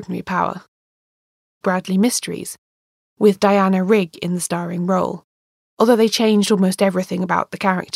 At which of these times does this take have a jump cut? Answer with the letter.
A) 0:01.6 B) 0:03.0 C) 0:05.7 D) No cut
A